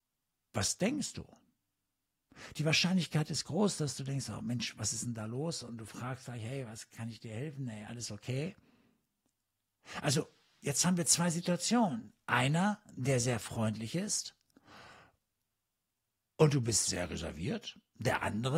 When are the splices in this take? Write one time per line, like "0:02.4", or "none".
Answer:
none